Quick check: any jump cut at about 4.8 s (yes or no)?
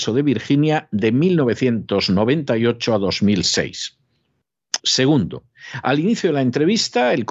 yes